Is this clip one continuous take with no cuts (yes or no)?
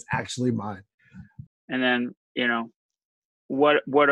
no